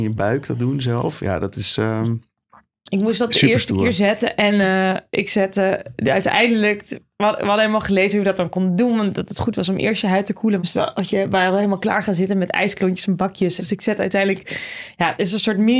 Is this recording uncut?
no; 2 cuts; at 10.6 s, 13.6 s

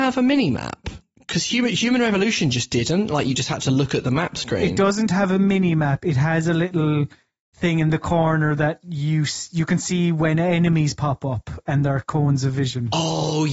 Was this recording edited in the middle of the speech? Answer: no; 0 cuts

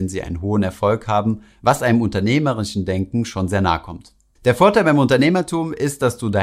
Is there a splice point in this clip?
no; 0 cuts

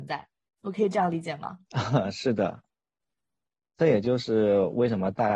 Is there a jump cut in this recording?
yes; 1 cut; at 1.6 s

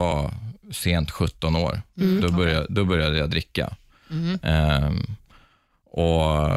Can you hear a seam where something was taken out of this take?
no; 0 cuts

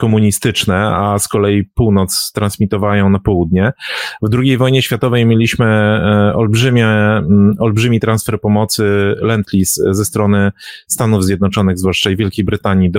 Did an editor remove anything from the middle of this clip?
no; 0 cuts

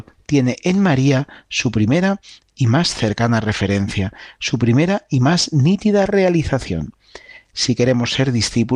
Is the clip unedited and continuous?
yes; 0 cuts

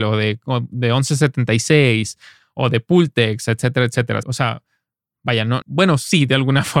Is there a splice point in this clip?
yes; 2 cuts; at 4.2 s, 5.6 s

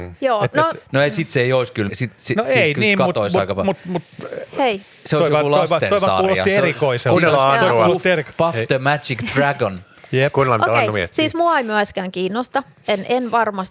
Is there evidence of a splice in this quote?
yes; 1 cut; at 1.9 s

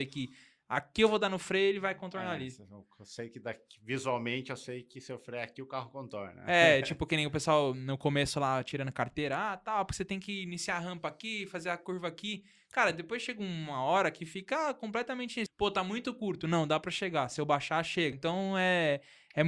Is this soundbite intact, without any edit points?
no; 2 cuts; at 15.5 s, 18.1 s

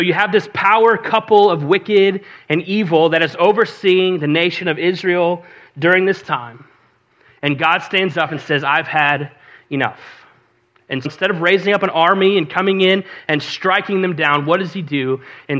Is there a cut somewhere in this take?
yes; 1 cut; at 11.0 s

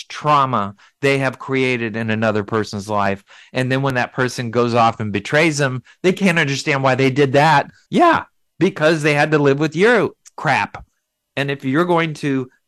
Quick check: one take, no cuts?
no; 1 cut; at 7.9 s

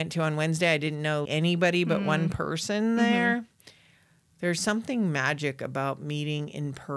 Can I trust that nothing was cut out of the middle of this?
no; 1 cut; at 1.3 s

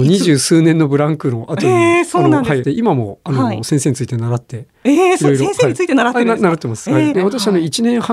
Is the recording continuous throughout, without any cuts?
no; 2 cuts; at 2.6 s, 7.1 s

